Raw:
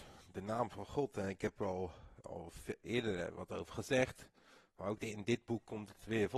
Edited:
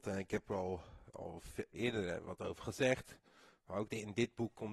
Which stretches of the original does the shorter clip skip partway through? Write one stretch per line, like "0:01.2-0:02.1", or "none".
none